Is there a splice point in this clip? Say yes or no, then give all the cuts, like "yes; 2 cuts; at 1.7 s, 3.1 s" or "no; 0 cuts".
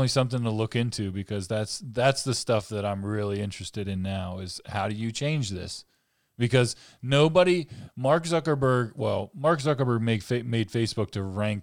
no; 0 cuts